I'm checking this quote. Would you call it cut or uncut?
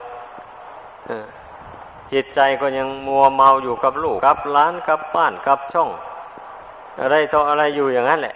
cut